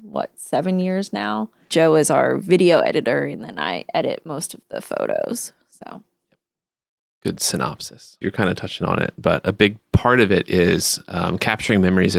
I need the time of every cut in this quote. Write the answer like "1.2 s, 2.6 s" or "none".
1.7 s, 8.2 s